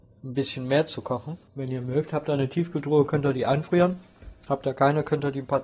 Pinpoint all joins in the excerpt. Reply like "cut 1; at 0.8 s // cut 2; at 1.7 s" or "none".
cut 1; at 1.5 s